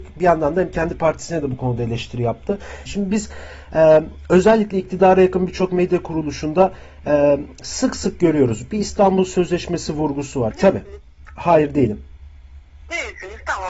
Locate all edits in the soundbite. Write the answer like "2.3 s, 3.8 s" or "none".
2.9 s, 10.5 s